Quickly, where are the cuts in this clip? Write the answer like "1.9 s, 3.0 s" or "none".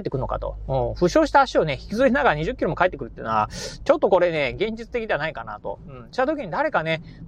none